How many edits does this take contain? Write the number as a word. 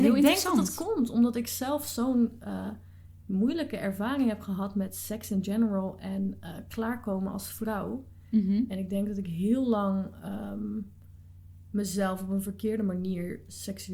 zero